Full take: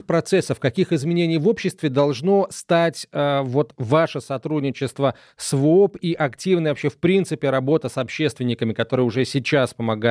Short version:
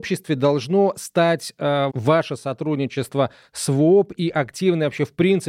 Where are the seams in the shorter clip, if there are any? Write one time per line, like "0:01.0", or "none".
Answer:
0:01.9